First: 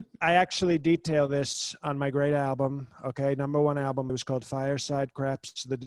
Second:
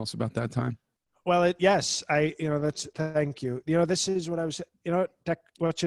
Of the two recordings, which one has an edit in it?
first; 1 cut; at 4.1 s

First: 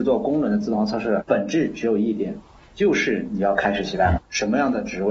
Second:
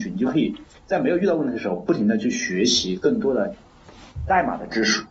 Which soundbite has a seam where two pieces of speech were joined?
first; 2 cuts; at 1.2 s, 4.2 s

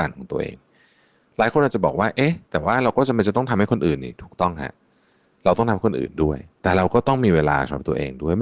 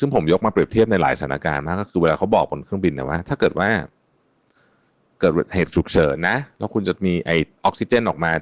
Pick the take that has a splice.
second; 1 cut; at 5.2 s

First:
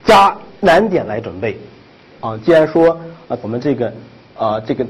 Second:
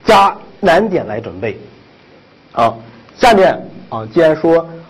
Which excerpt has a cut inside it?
first; 2 cuts; at 2.2 s, 3.4 s

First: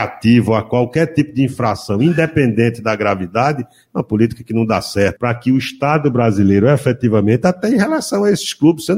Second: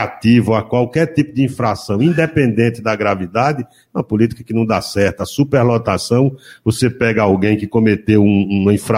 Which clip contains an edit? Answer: first; 1 cut; at 5.2 s

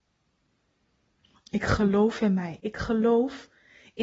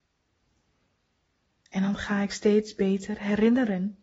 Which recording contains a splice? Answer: first; 1 cut; at 2.6 s

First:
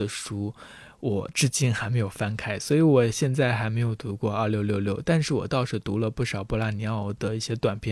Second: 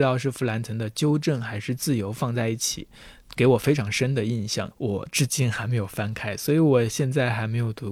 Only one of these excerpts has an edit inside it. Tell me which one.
second; 1 cut; at 4.7 s

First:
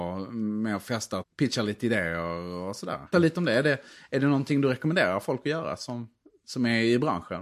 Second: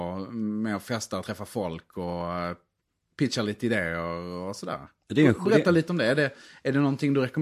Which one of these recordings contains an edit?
first; 2 cuts; at 1.2 s, 3.1 s

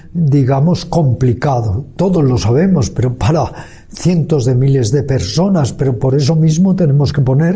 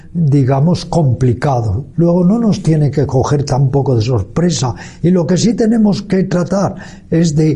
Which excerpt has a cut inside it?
second; 1 cut; at 1.9 s

